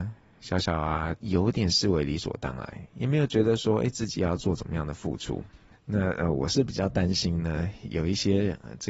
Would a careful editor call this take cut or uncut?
cut